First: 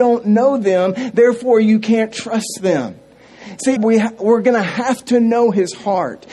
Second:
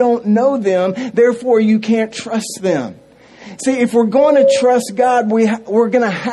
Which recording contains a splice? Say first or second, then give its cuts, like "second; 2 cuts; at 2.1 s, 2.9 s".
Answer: first; 1 cut; at 3.8 s